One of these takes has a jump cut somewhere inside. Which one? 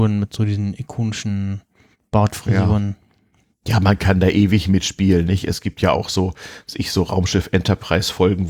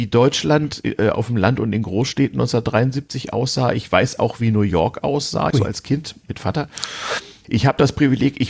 second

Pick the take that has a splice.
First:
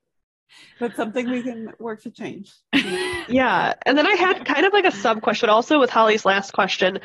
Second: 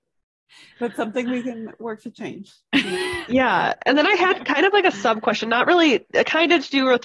first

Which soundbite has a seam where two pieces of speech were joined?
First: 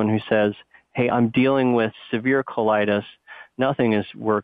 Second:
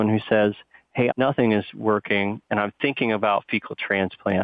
second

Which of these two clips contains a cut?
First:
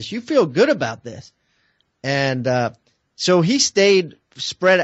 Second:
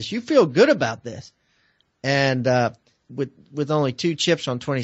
second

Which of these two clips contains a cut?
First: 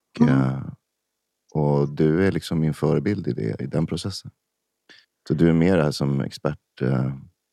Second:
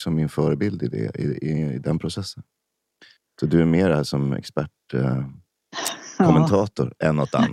first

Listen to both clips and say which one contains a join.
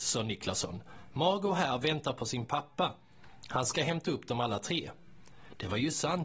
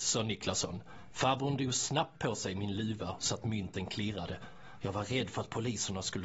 second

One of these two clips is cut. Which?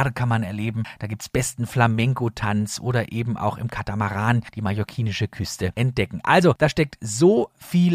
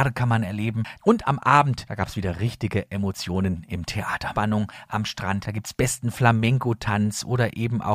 second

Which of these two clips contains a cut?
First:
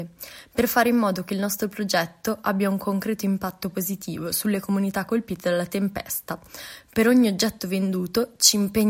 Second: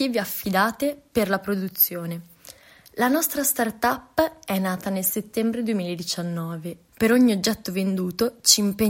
second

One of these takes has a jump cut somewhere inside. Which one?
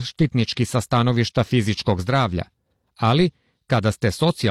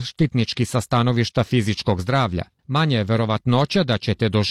second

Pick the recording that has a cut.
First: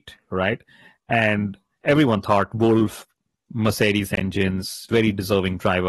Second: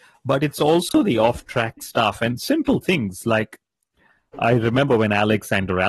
first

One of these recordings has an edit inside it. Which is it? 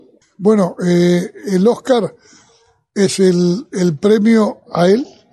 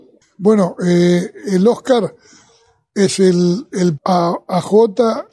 second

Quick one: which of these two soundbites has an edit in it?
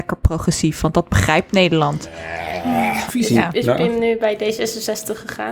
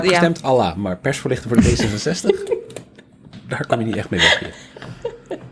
first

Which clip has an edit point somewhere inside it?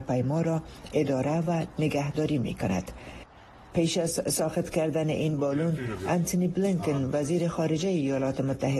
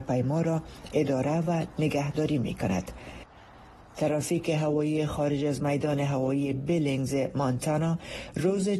first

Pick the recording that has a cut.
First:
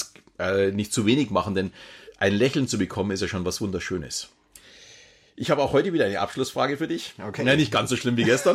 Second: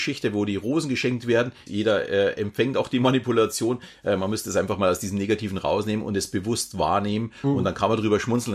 second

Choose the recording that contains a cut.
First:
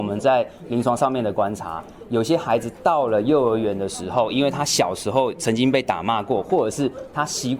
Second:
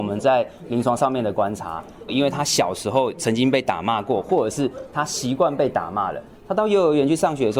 second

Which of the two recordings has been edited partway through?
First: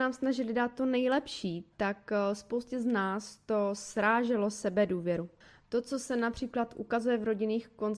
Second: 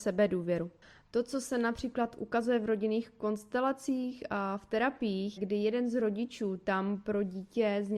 second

